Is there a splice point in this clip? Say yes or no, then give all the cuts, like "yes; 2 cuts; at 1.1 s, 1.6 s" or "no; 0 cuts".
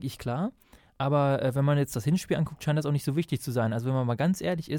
no; 0 cuts